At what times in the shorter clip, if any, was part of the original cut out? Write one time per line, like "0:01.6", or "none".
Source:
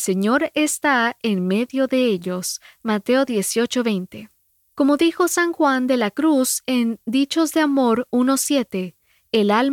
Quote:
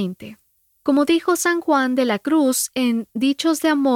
none